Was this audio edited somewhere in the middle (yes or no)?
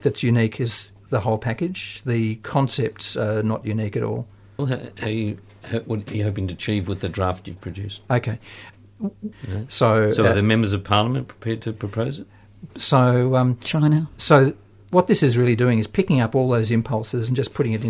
yes